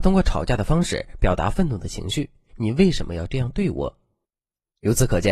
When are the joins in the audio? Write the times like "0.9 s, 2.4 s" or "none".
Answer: 2.5 s